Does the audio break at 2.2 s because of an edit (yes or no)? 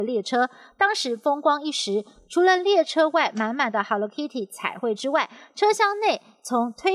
no